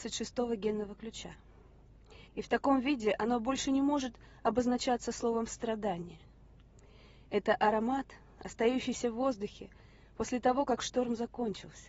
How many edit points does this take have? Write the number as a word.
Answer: one